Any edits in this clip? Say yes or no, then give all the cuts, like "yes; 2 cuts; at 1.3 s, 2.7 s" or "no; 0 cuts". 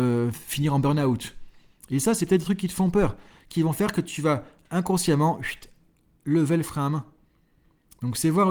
no; 0 cuts